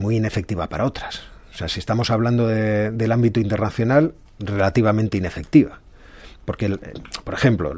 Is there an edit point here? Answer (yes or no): no